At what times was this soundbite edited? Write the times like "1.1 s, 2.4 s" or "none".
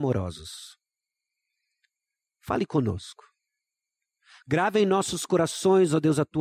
none